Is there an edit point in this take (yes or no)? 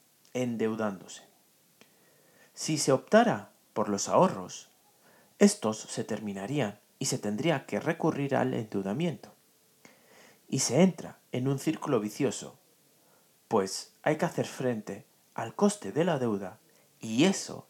no